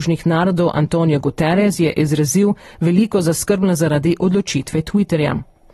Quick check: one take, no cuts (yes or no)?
yes